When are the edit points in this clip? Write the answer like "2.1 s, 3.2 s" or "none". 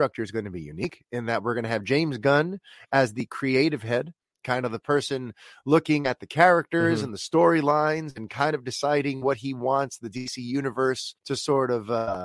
11.2 s